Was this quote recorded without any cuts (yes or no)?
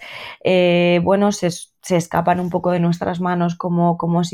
yes